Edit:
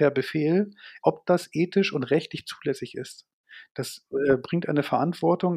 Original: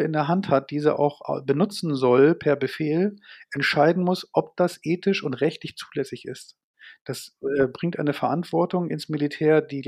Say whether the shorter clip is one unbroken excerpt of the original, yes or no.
no